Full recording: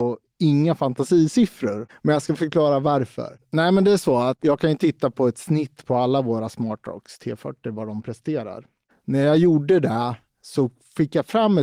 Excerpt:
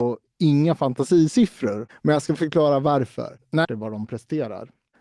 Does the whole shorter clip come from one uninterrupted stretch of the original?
no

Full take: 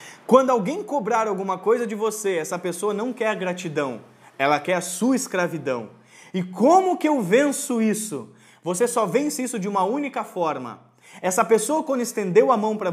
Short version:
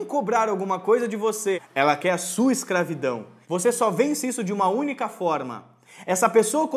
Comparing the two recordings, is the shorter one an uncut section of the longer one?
no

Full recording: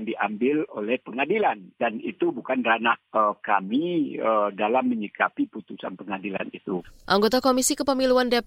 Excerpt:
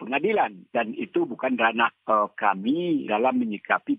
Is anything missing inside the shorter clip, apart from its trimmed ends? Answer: yes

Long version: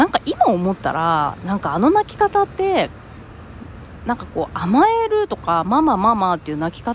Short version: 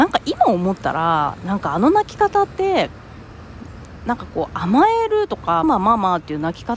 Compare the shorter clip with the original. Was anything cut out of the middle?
yes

